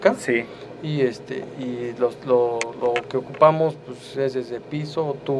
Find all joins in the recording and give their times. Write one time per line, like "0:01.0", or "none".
none